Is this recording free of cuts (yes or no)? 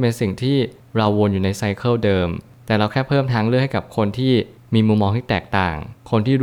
yes